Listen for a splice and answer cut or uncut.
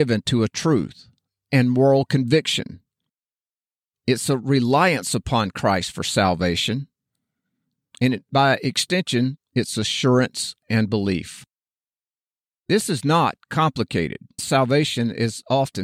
cut